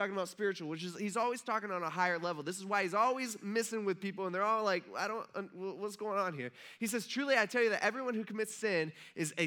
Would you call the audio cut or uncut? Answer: uncut